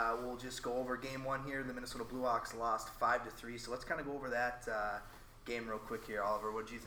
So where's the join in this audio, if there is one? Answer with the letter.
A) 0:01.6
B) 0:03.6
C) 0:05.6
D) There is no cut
D